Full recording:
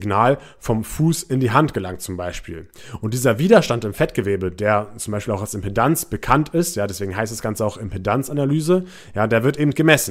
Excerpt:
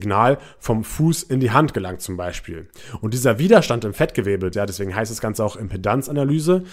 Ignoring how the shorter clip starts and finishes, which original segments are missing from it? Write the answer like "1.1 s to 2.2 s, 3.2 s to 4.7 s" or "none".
4.5 s to 6.7 s